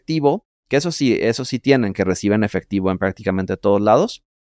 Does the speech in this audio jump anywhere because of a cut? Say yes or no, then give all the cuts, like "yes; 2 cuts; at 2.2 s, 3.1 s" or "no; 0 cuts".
no; 0 cuts